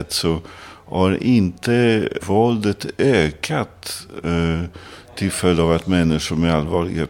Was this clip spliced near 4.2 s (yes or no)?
no